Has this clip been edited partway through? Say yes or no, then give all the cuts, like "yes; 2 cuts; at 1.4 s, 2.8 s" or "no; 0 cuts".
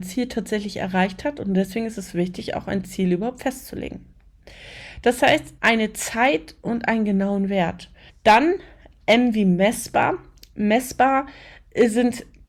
yes; 2 cuts; at 5.6 s, 8.1 s